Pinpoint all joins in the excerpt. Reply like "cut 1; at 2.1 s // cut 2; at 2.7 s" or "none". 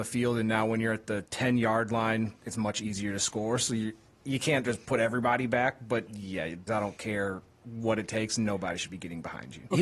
cut 1; at 6.7 s